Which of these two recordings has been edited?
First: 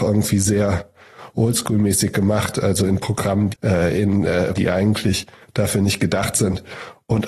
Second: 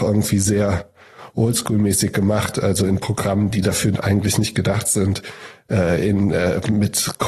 first; 2 cuts; at 3.5 s, 4.6 s

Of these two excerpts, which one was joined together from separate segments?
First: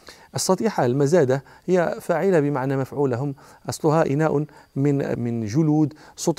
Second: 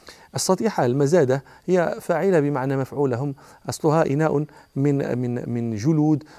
first; 1 cut; at 5.2 s

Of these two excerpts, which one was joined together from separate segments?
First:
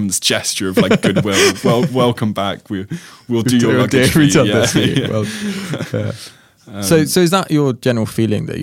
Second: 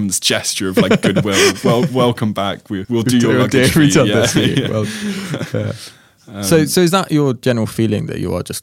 second; 1 cut; at 2.8 s

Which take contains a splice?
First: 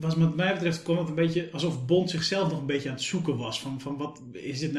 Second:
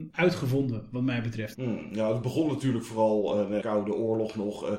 second; 2 cuts; at 1.5 s, 3.6 s

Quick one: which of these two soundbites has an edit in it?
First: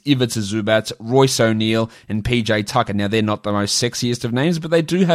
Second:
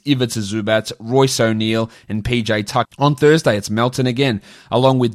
second; 1 cut; at 2.8 s

